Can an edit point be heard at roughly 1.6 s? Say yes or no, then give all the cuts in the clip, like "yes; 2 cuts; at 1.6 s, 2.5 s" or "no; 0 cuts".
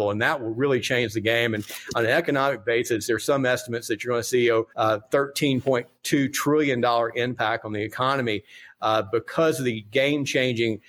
no; 1 cut; at 4.7 s